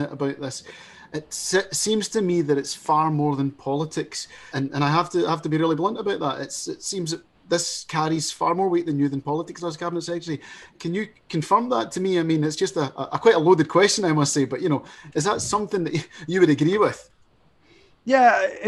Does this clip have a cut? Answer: yes; 1 cut; at 4.5 s

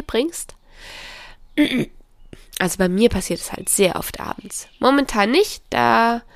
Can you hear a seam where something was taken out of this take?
no; 0 cuts

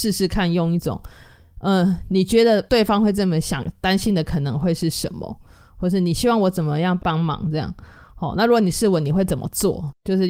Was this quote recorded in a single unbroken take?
no; 1 cut; at 7.0 s

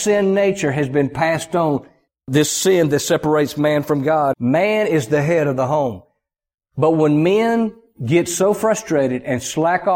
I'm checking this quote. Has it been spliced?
yes; 2 cuts; at 2.1 s, 4.3 s

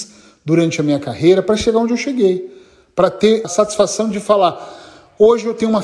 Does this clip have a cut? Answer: yes; 1 cut; at 3.4 s

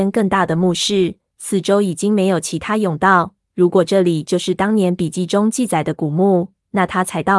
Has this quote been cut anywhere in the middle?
yes; 1 cut; at 3.4 s

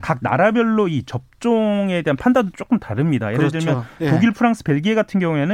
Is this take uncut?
yes; 0 cuts

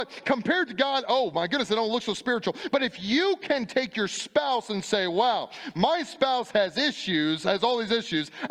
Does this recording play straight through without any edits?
yes; 0 cuts

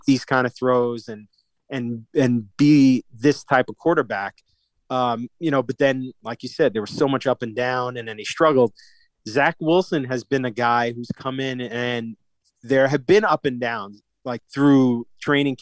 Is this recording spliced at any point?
no; 0 cuts

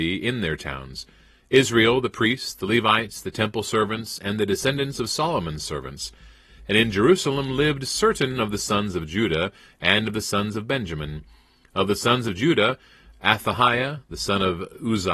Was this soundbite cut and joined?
no; 0 cuts

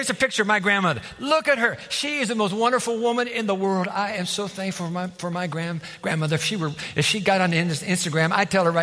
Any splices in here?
no; 0 cuts

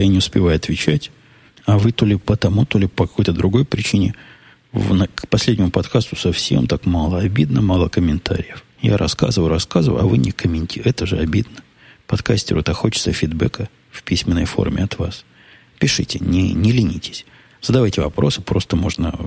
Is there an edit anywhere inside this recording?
yes; 1 cut; at 8.7 s

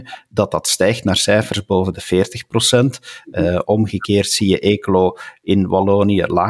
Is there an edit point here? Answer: no; 0 cuts

